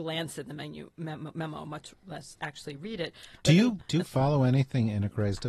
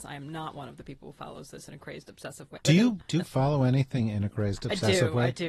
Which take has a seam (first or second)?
second